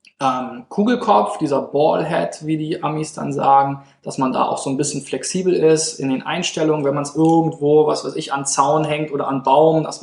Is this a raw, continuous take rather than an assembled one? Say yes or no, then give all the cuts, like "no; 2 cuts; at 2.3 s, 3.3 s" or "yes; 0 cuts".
yes; 0 cuts